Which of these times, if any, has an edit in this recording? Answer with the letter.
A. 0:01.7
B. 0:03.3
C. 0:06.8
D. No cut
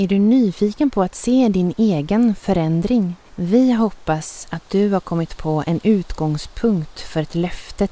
B